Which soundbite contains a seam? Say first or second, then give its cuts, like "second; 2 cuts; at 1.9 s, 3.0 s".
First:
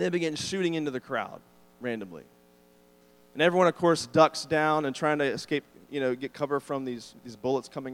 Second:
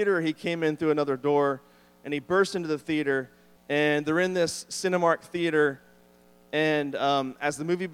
second; 1 cut; at 3.6 s